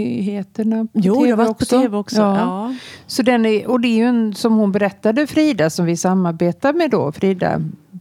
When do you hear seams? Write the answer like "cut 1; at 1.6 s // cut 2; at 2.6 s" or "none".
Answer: none